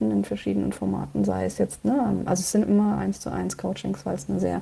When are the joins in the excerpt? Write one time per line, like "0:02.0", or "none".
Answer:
none